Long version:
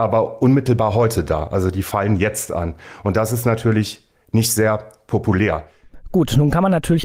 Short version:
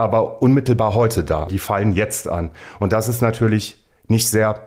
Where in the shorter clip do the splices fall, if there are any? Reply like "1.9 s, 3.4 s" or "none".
1.5 s